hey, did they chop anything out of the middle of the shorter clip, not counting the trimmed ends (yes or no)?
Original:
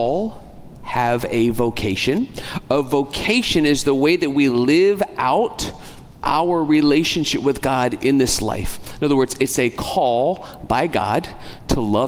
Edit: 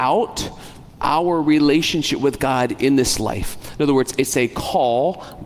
no